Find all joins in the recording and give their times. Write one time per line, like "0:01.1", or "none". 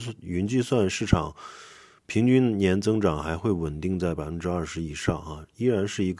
none